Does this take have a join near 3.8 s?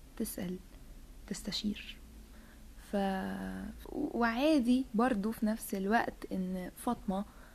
yes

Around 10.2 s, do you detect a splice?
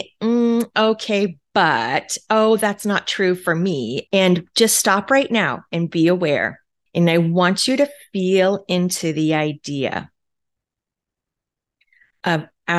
no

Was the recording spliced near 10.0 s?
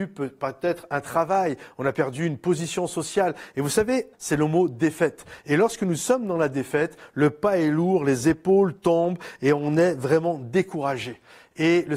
no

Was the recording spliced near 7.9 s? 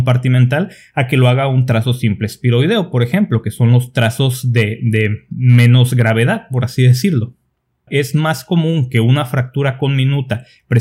yes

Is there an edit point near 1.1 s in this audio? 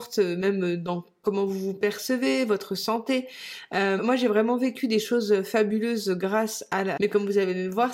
no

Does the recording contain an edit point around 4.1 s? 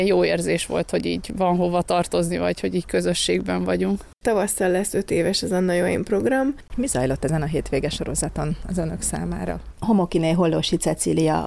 yes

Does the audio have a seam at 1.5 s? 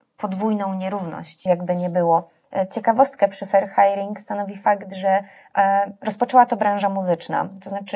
yes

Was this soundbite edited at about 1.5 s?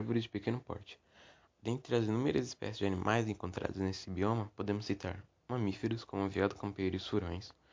yes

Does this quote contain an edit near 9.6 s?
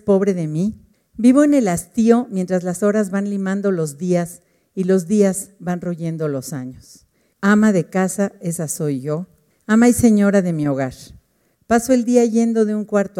no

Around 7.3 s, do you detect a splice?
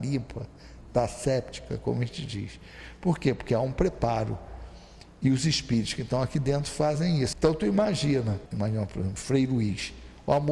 yes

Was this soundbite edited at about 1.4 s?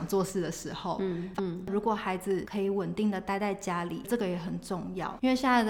yes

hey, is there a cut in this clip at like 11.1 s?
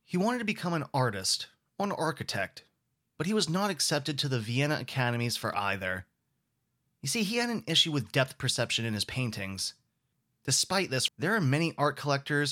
yes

